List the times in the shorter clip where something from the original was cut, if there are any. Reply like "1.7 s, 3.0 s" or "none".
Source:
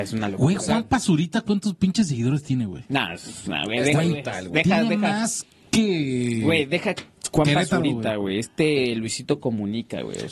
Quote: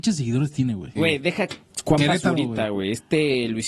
1.0 s